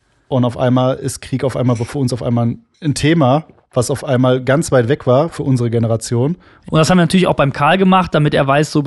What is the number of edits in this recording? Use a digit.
2